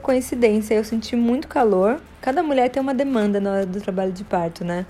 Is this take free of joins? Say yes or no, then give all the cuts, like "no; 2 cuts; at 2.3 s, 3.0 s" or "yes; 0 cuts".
yes; 0 cuts